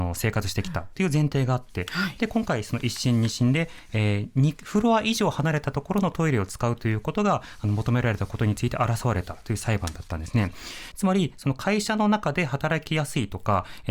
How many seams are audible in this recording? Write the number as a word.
one